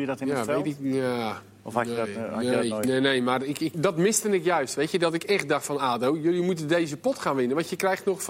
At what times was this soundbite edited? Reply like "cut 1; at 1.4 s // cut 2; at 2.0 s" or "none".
cut 1; at 3.7 s